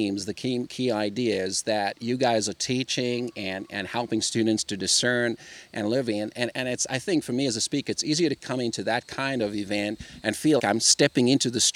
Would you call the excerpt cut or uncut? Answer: cut